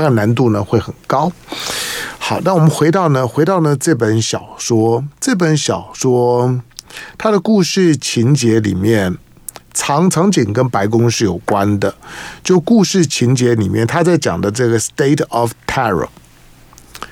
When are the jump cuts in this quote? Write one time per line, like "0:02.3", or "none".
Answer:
none